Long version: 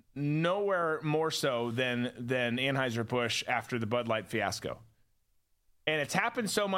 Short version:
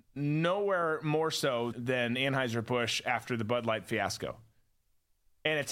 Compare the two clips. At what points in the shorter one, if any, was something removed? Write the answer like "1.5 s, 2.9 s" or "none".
1.7 s